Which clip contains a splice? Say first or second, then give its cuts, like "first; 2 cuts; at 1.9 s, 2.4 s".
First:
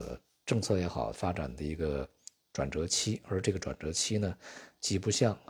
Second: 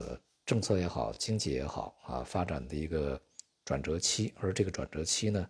first; 1 cut; at 1.1 s